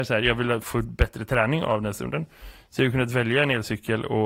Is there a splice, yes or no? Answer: no